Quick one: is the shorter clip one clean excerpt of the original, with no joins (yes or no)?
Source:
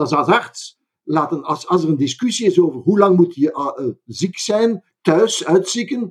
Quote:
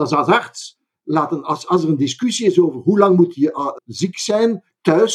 no